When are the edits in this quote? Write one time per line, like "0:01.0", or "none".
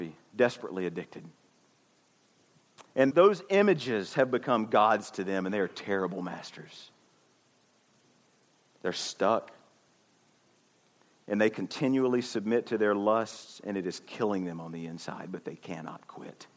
0:03.1